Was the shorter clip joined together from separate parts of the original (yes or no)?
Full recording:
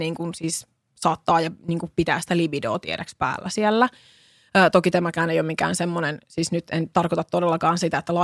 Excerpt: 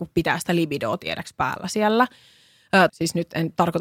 yes